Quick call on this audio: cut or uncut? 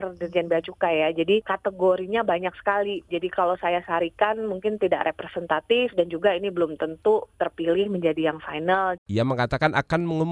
cut